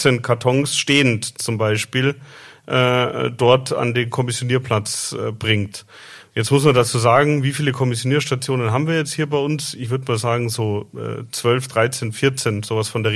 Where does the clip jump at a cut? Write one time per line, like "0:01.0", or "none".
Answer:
none